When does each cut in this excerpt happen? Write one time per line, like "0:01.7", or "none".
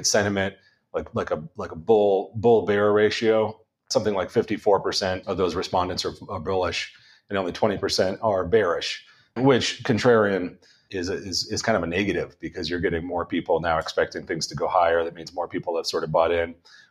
none